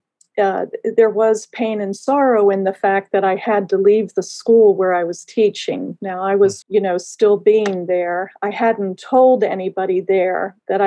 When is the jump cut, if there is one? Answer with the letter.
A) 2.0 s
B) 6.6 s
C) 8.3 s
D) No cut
B